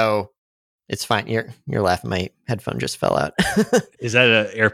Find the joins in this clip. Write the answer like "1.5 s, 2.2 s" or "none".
none